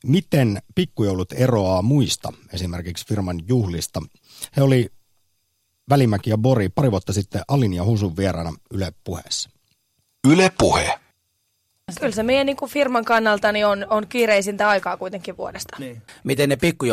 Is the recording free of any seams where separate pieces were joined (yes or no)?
yes